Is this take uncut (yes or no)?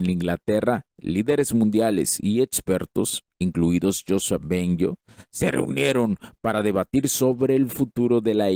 yes